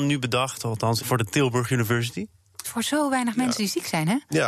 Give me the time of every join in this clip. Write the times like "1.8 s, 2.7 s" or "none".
1.0 s, 2.6 s